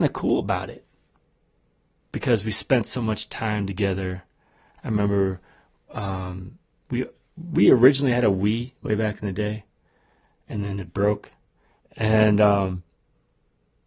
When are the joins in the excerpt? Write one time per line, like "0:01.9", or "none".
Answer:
0:04.7
0:11.8